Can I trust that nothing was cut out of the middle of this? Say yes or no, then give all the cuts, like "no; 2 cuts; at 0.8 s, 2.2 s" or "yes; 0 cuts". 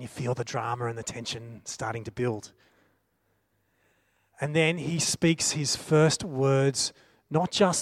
yes; 0 cuts